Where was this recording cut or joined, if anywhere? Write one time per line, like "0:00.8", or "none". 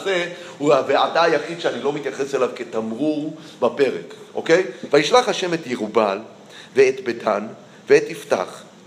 0:04.9